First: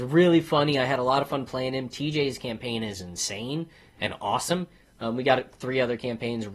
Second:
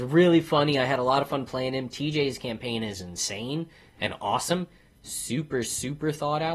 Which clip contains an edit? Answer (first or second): first